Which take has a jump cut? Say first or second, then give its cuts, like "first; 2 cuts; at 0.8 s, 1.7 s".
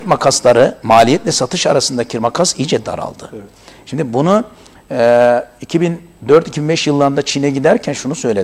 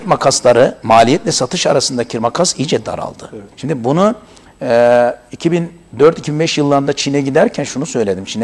second; 1 cut; at 3.5 s